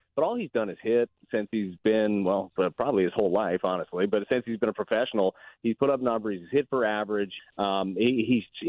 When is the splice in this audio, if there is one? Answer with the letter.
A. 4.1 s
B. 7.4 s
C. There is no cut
B